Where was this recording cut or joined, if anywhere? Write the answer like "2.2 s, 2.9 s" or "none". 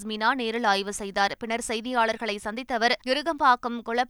3.0 s